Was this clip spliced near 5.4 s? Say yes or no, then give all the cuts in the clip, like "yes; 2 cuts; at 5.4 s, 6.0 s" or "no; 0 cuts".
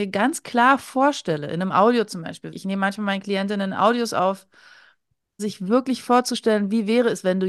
yes; 2 cuts; at 2.5 s, 5.4 s